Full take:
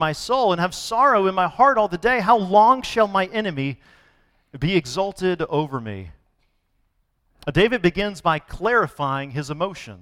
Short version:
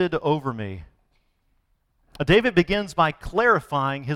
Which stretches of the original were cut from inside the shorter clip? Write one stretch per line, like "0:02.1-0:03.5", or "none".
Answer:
none